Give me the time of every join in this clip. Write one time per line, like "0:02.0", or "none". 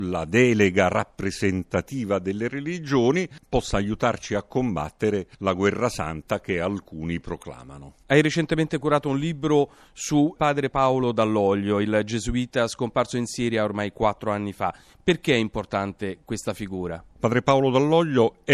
none